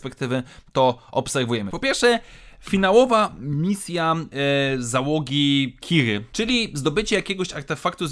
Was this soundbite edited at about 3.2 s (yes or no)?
no